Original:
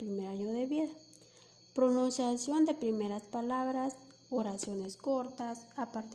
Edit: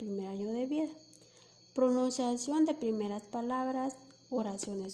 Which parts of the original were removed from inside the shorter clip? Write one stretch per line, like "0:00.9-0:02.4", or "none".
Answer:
none